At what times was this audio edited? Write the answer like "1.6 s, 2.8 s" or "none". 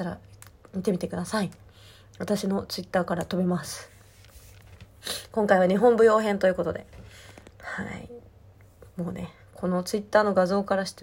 none